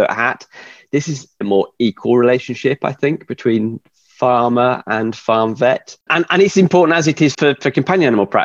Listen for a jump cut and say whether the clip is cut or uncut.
cut